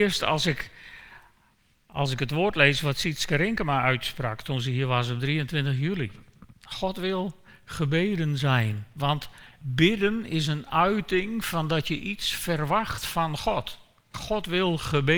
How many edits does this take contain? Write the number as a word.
one